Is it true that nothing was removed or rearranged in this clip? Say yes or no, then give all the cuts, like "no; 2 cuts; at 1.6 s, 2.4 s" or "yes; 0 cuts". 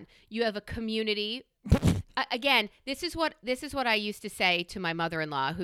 yes; 0 cuts